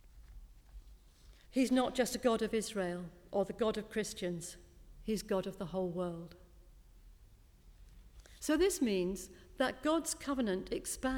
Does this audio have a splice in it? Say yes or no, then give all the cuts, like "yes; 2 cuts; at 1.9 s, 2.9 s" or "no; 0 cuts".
yes; 2 cuts; at 1.4 s, 8.4 s